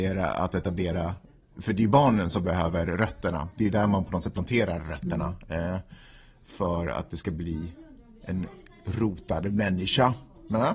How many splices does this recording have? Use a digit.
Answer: 0